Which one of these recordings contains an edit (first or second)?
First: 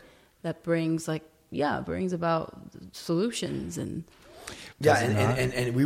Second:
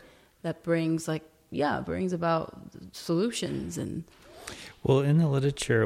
first